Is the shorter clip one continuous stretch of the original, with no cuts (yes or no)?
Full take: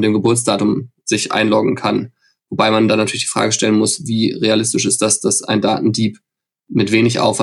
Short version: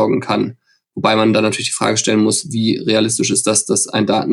yes